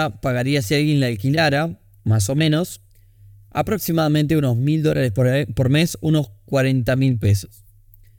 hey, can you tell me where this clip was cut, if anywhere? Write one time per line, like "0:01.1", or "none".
none